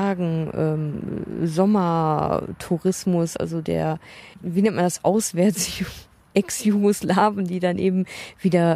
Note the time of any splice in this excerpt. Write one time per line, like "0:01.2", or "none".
none